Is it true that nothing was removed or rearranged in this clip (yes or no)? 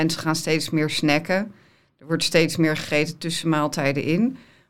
yes